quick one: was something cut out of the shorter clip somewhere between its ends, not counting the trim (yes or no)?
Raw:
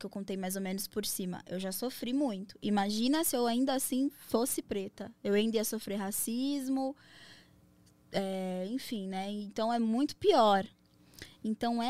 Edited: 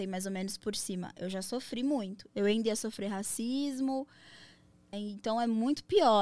yes